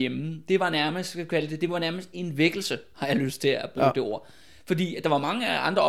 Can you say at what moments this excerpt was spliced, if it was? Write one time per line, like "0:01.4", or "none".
none